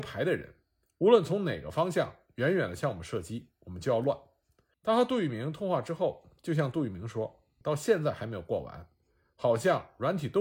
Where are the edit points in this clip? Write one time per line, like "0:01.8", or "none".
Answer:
0:04.7
0:07.6